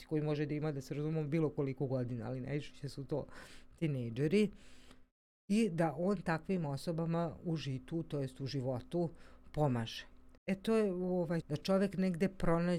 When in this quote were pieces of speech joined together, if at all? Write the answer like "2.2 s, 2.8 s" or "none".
10.4 s, 11.4 s